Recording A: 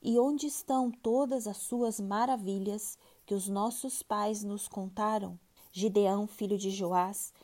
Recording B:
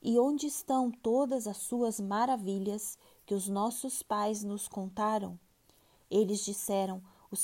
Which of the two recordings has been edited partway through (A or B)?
A